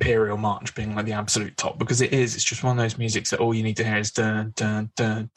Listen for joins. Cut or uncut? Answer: uncut